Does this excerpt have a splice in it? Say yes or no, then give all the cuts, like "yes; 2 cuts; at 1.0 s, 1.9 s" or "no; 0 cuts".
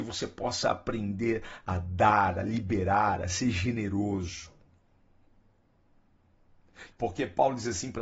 yes; 1 cut; at 6.9 s